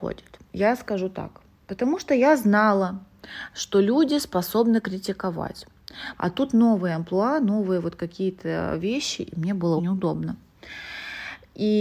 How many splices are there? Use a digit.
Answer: 2